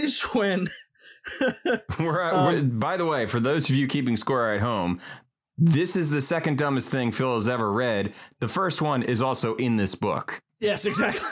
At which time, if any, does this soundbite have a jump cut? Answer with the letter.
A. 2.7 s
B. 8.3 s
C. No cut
C